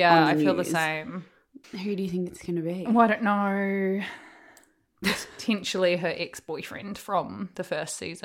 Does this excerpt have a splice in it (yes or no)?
yes